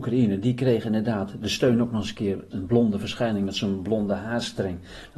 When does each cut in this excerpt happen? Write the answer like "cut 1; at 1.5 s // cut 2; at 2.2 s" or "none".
cut 1; at 2.5 s